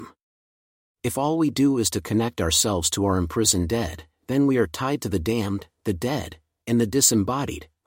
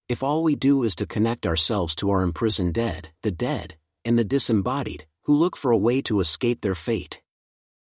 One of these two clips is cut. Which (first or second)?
second